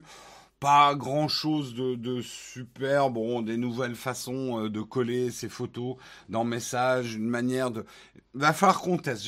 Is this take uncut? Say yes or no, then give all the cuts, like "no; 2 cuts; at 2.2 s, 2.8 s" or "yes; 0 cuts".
yes; 0 cuts